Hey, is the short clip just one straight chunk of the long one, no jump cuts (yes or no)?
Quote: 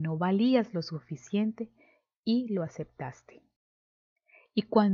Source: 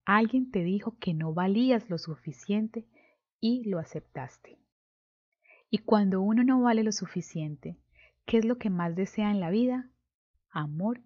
yes